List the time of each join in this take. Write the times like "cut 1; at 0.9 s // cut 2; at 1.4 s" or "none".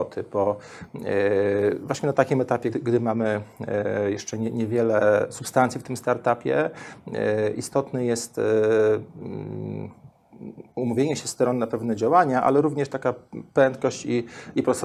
cut 1; at 2.7 s